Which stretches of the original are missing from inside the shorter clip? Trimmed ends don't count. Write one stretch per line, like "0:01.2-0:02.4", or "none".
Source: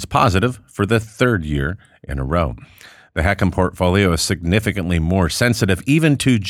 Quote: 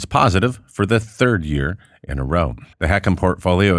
0:02.7-0:03.1